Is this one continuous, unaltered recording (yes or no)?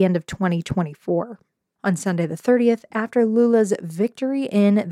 no